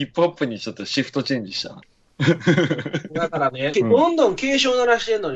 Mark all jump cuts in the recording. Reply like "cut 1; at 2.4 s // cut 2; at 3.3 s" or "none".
cut 1; at 1.8 s // cut 2; at 3.7 s